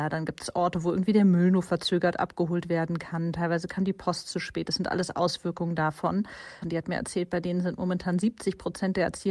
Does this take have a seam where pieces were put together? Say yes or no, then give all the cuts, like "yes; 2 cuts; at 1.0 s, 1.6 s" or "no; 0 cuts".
yes; 1 cut; at 6.6 s